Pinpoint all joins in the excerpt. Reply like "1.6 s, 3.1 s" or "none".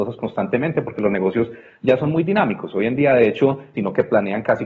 3.7 s

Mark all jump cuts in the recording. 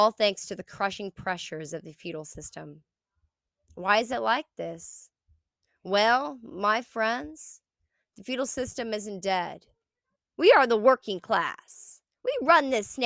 10.1 s

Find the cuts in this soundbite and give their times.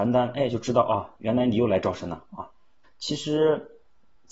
2.8 s

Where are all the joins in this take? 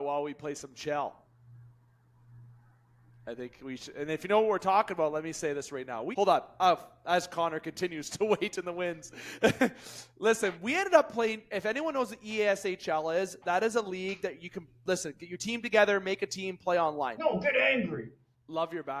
6.1 s, 17.2 s

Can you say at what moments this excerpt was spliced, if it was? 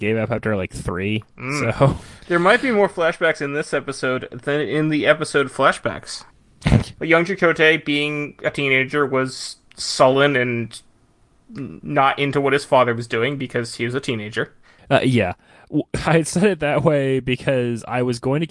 7.0 s

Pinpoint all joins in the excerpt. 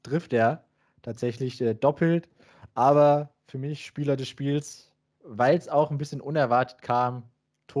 none

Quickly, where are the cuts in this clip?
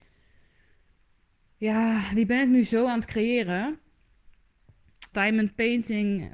5.1 s

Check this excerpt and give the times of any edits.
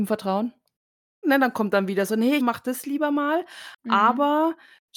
1.2 s, 2.4 s

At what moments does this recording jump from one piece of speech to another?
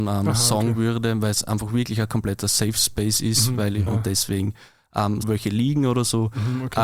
3.9 s, 5.2 s

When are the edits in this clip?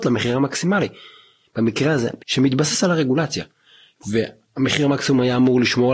2.2 s

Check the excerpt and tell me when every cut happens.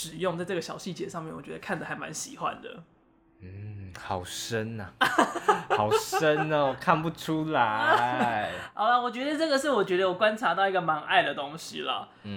none

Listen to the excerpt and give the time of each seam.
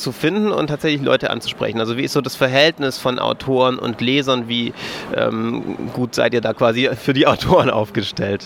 none

